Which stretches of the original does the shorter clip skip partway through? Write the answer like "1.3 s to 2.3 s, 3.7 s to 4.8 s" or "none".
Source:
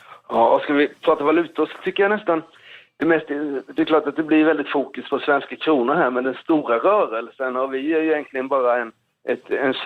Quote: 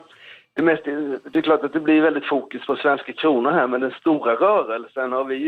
none